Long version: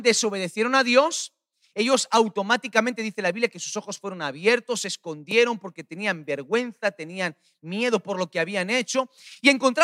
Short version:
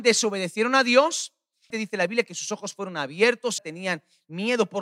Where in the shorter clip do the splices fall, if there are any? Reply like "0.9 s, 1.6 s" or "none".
1.7 s, 3.6 s